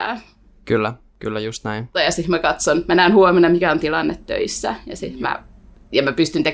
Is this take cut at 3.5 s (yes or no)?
no